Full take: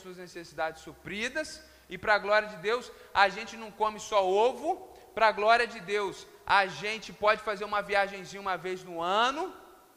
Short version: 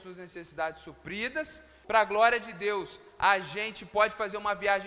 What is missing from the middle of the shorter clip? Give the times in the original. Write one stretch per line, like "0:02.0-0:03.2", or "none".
0:01.8-0:05.1